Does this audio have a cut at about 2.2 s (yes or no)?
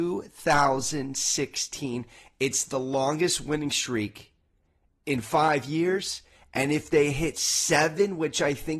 no